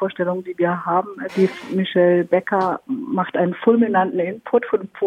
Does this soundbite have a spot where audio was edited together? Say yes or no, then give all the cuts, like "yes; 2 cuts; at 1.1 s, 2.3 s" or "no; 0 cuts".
yes; 1 cut; at 1.3 s